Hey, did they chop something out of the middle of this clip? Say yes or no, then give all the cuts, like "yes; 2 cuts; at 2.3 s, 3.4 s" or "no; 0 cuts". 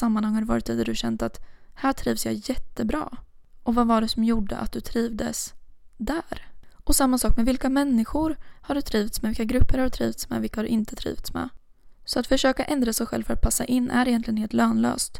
no; 0 cuts